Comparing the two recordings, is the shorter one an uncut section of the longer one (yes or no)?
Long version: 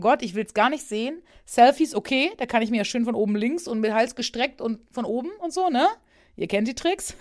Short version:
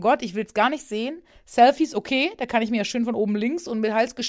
yes